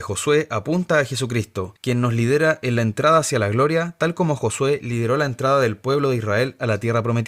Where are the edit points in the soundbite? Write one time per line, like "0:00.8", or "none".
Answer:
0:01.8